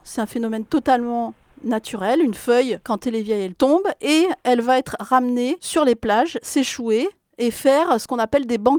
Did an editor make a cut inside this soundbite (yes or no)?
no